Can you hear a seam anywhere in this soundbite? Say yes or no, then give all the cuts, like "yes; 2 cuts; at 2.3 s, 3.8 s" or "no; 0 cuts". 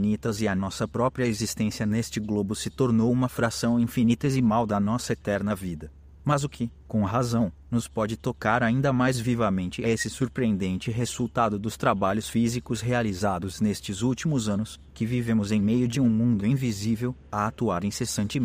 no; 0 cuts